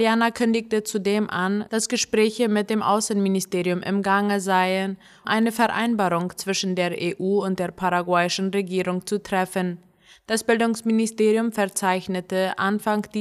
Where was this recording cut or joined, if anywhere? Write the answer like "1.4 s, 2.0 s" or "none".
5.2 s